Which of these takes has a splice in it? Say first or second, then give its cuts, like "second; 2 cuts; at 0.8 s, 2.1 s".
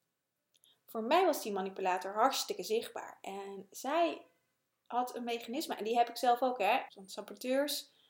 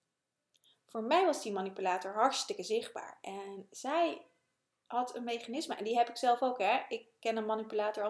first; 1 cut; at 6.9 s